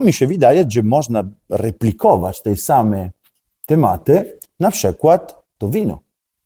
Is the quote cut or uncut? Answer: uncut